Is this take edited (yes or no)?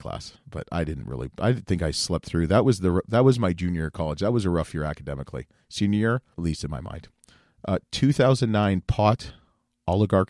yes